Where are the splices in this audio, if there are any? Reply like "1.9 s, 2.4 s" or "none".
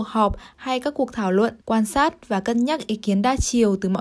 1.6 s